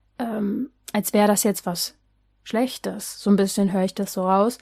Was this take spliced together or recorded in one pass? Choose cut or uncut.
uncut